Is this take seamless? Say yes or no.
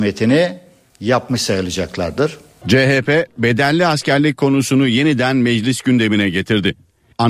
no